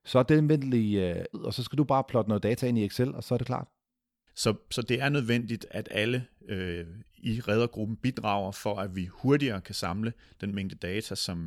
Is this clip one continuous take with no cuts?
no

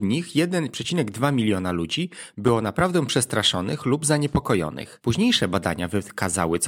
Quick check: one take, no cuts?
yes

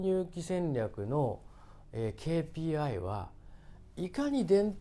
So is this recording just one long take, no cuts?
yes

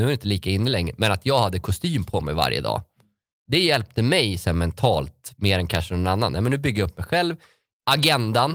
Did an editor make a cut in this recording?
no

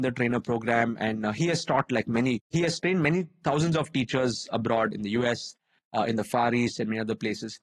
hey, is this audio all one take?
yes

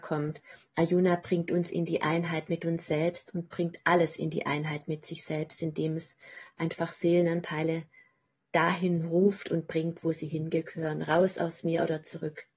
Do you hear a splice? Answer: no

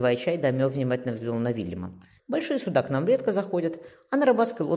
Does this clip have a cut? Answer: yes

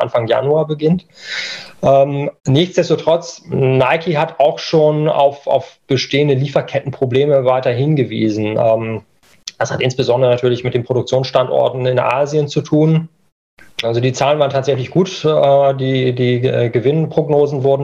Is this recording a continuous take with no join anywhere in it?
no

